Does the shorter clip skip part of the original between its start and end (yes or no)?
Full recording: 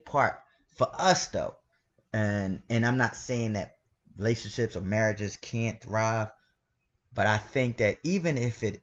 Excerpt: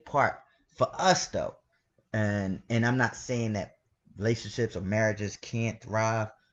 no